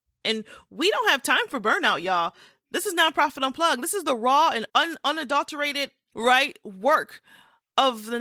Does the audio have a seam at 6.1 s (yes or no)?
yes